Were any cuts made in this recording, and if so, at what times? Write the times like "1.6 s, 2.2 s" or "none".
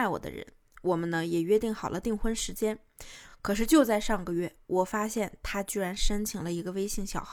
none